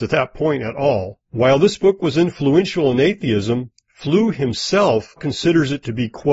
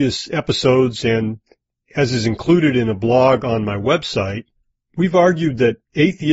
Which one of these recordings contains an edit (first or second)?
first